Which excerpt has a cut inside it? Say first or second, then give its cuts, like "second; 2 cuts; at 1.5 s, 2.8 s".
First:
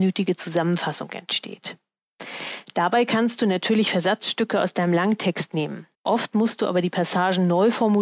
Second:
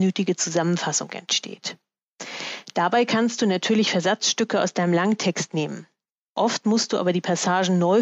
first; 1 cut; at 6.0 s